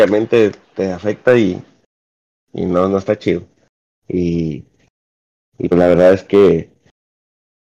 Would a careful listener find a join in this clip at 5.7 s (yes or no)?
yes